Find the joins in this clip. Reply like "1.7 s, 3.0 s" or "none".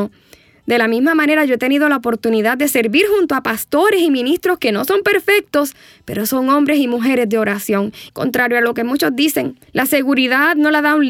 8.1 s, 9.7 s